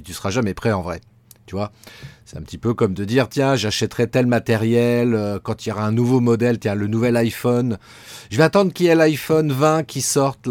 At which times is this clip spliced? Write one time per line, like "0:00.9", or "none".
none